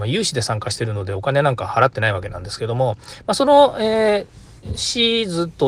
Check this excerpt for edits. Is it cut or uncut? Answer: uncut